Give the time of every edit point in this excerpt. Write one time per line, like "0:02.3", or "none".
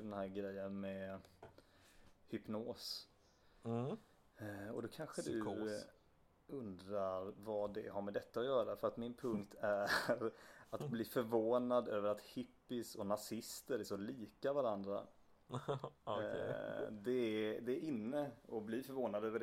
none